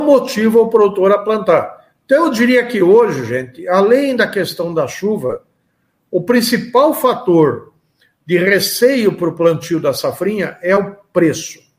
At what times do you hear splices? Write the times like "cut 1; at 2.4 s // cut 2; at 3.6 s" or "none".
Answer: none